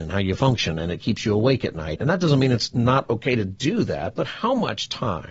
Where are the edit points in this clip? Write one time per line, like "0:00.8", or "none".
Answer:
0:02.0